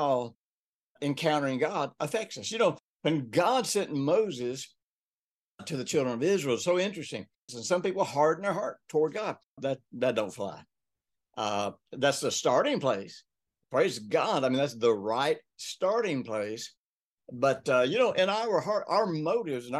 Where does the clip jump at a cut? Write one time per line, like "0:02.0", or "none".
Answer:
0:07.5
0:09.6